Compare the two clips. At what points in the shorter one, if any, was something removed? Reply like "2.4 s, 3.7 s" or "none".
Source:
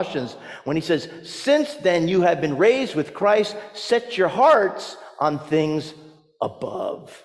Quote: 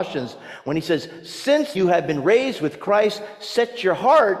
1.7 s

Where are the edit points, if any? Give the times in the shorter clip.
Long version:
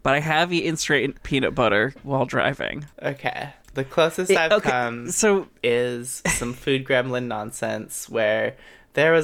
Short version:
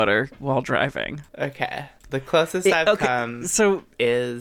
none

